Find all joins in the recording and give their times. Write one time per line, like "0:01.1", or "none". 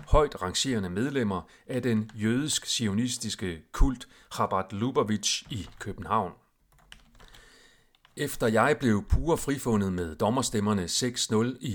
none